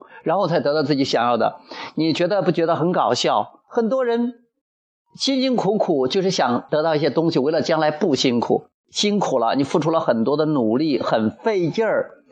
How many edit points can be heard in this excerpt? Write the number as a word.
two